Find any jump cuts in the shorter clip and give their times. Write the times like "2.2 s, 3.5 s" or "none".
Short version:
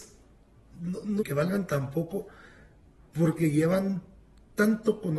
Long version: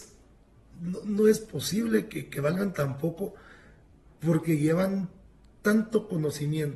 1.2 s